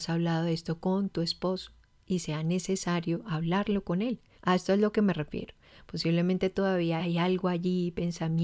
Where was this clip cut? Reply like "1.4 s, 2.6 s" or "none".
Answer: 4.3 s, 7.0 s